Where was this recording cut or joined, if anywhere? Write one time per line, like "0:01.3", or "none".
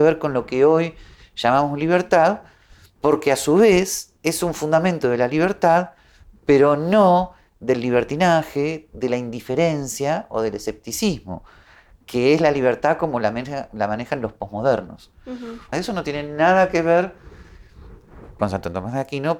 0:15.7
0:18.4

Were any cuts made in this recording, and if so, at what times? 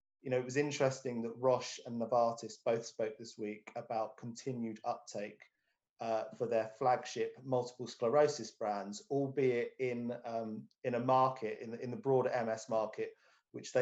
none

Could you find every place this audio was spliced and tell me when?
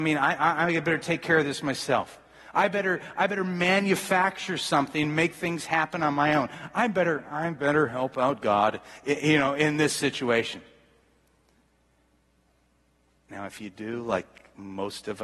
0:02.5

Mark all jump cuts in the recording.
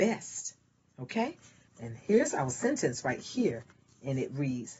0:01.7

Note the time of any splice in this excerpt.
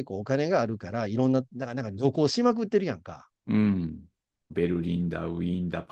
0:04.5

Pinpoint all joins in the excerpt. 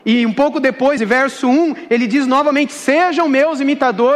0:01.0

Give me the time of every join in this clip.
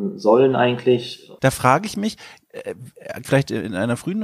0:01.4
0:03.2

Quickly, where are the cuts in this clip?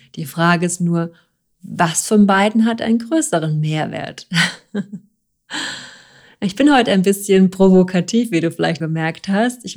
0:08.8

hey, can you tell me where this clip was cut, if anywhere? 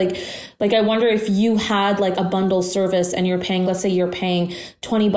0:02.1
0:03.6

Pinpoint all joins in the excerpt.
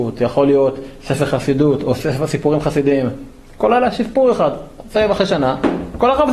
none

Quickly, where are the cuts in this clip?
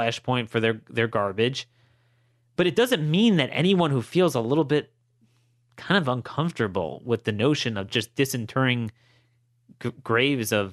none

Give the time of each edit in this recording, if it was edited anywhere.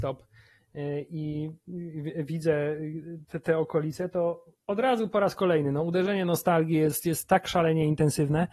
none

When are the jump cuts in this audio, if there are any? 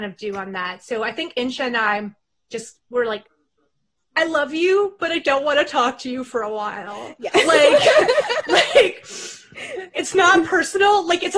0:02.5
0:09.9

